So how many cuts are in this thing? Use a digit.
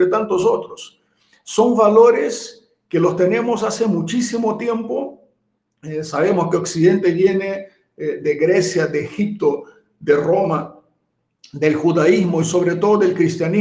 0